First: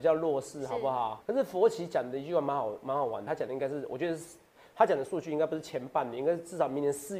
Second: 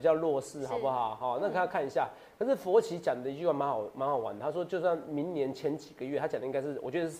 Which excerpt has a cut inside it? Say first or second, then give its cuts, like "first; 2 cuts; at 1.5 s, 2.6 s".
first; 2 cuts; at 1.2 s, 3.3 s